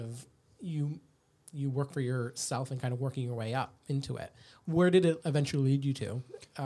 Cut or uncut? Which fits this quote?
uncut